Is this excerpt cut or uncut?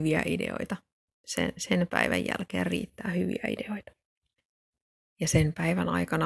uncut